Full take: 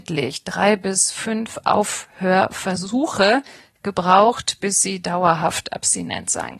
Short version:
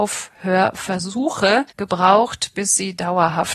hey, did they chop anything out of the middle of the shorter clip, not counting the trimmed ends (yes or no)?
yes